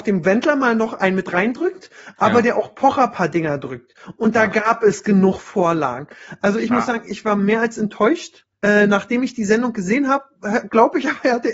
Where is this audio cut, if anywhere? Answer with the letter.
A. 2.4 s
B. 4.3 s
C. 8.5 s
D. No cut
C